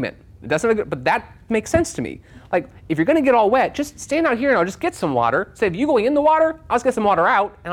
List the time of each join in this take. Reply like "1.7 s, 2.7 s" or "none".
1.5 s

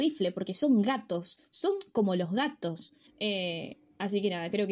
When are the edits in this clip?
3.1 s

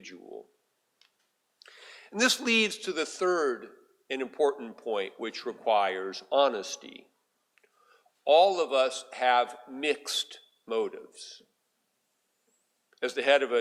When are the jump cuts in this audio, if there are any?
none

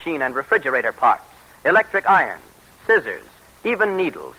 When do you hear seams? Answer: none

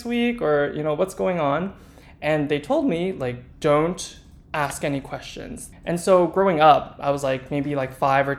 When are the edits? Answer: 5.7 s

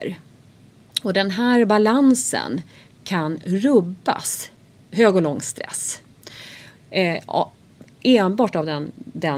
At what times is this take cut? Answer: none

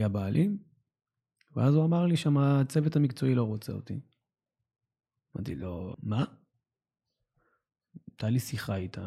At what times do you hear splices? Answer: 5.9 s

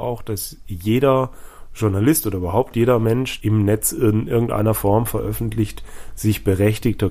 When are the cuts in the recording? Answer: 3.4 s

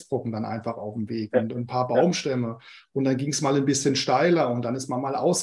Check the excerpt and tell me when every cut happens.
none

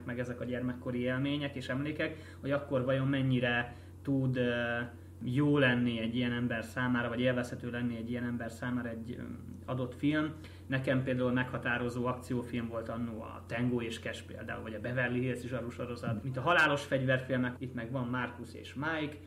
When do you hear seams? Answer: 16.2 s, 17.6 s

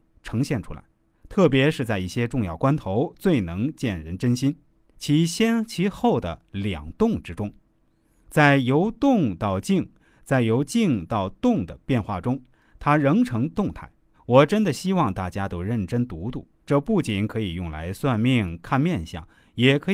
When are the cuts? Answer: 4.9 s, 14.1 s

